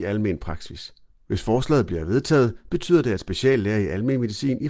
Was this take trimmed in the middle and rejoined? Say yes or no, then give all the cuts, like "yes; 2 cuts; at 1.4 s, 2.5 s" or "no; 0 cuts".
no; 0 cuts